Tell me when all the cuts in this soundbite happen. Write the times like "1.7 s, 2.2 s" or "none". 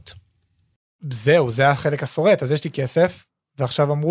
none